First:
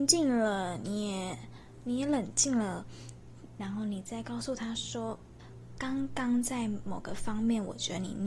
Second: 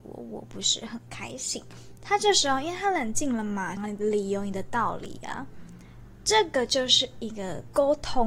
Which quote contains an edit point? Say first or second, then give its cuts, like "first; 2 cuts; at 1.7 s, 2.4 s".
second; 2 cuts; at 2.0 s, 3.8 s